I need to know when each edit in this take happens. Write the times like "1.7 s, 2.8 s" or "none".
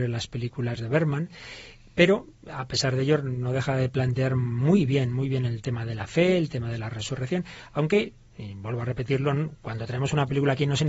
none